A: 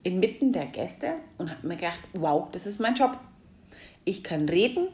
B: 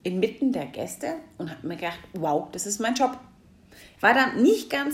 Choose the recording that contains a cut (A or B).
B